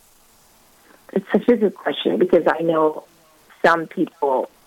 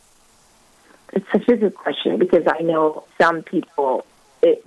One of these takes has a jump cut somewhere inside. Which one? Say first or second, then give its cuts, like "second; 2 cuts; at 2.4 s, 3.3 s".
second; 1 cut; at 3.1 s